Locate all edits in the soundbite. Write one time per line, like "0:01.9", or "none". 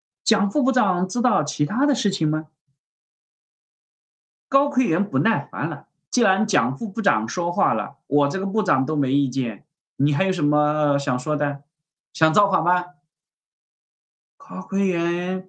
0:06.1